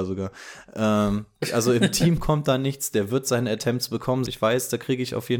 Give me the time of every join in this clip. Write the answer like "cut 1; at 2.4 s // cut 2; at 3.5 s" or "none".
cut 1; at 4.2 s

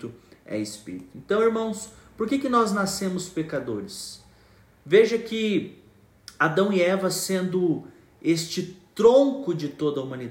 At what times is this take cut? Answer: none

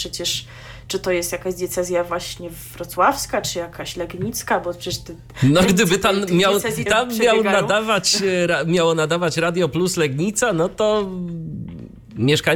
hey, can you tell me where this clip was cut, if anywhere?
cut 1; at 6.9 s

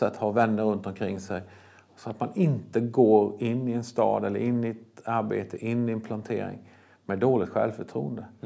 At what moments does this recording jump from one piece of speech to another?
none

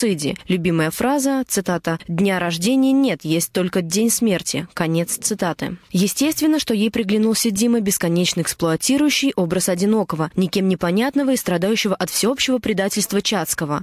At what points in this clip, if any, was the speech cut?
none

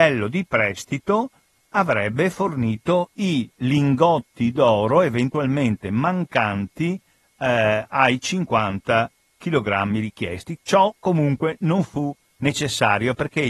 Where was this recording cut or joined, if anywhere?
none

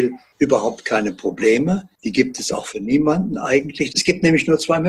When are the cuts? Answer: cut 1; at 3.9 s

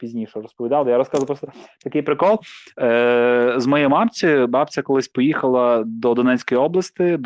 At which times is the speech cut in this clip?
none

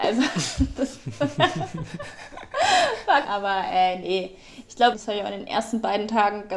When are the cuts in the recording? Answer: cut 1; at 3.2 s // cut 2; at 4.9 s

